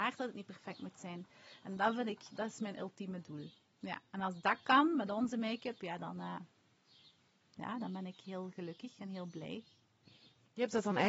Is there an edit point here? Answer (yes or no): no